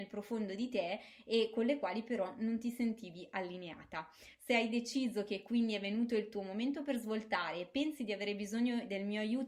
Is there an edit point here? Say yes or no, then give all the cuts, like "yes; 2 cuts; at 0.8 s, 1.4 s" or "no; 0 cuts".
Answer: no; 0 cuts